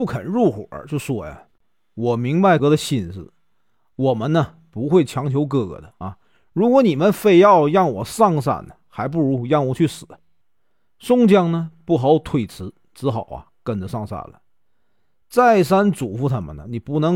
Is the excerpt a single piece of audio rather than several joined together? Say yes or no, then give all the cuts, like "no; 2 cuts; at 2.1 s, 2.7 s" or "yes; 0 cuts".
no; 3 cuts; at 2.6 s, 6.0 s, 10.4 s